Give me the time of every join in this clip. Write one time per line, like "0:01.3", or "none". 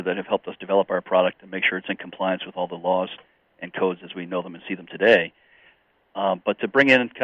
none

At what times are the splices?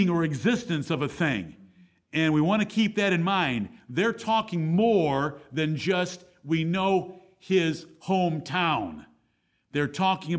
none

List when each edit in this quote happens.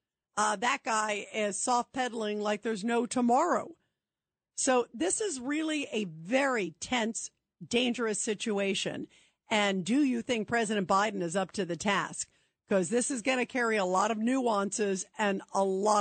none

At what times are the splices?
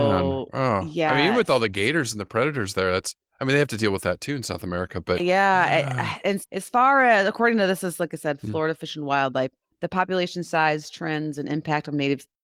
0:05.2
0:06.4

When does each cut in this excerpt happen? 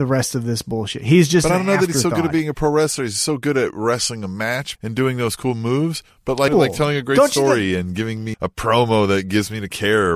0:04.8
0:06.5
0:08.3

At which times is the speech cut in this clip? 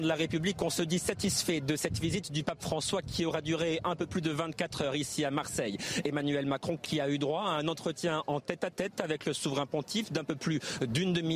none

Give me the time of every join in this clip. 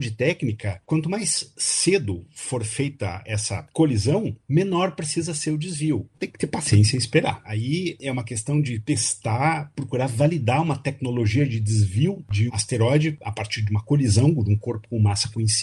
0:06.1
0:07.4
0:12.5

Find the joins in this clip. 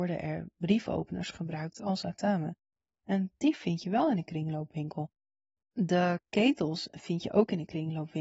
none

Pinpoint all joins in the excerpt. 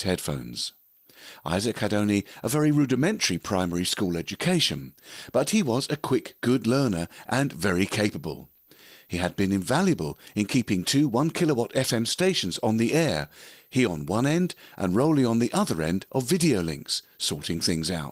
none

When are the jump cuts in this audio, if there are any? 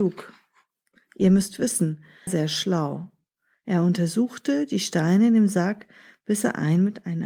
0:02.3

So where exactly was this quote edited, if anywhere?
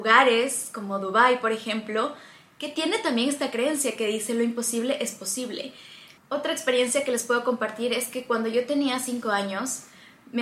0:06.2

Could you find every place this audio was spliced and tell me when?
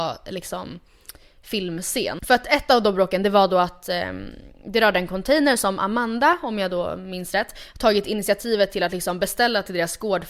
0:02.2

